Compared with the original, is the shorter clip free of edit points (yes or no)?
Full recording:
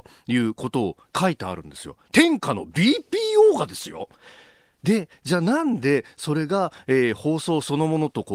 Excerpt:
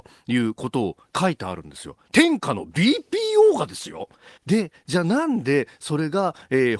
no